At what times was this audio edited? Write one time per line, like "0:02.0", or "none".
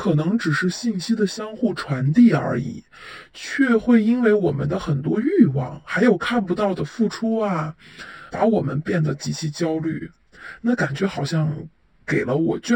0:08.3

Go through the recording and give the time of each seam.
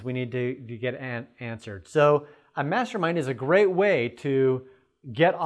none

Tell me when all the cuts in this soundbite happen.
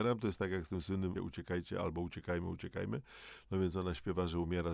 0:01.1

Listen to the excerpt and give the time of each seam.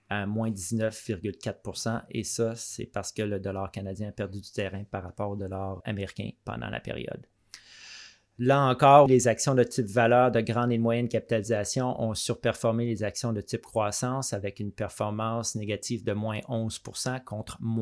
0:05.8
0:09.1

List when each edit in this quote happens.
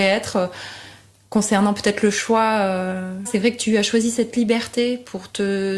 0:03.3

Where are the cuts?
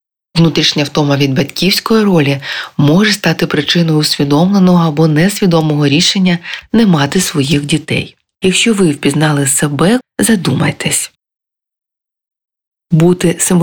0:08.4
0:10.0

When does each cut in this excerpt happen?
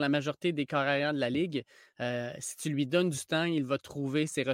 none

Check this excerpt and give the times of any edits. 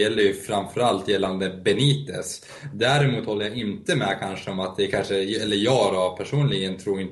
none

